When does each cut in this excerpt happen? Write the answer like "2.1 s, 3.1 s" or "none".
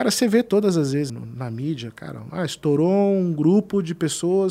1.1 s